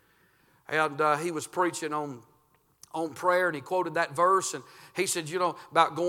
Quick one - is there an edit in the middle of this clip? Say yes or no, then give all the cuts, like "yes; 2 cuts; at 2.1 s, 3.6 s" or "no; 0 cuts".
no; 0 cuts